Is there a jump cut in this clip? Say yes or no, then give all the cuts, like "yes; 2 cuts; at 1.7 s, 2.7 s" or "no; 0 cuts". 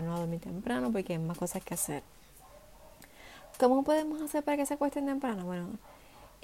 no; 0 cuts